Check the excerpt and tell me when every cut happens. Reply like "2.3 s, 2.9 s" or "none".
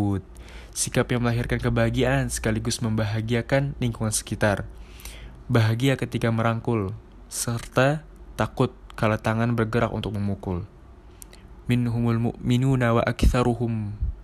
5.4 s, 11.6 s

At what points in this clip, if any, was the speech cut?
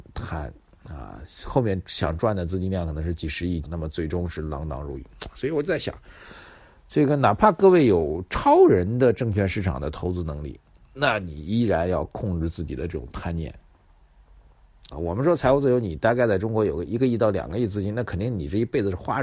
3.6 s, 14.9 s

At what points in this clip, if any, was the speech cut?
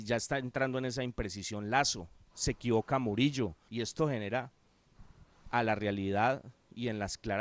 3.7 s

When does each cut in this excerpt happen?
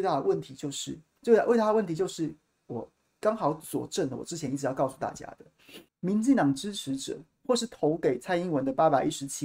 5.9 s

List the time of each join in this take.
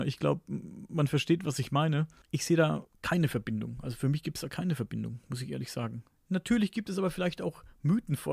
none

